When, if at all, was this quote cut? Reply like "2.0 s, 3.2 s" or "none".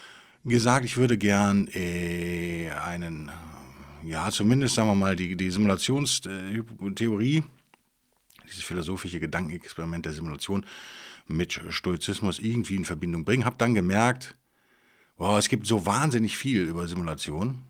none